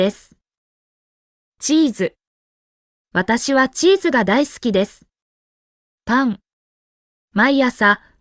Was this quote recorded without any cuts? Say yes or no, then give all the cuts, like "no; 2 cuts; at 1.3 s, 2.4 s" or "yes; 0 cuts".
yes; 0 cuts